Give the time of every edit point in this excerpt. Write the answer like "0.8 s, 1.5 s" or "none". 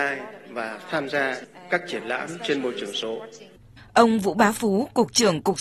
3.8 s